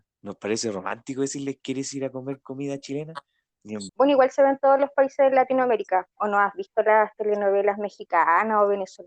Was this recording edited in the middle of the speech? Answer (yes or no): yes